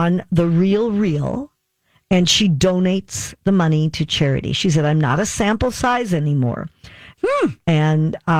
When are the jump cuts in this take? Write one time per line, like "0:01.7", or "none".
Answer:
0:07.1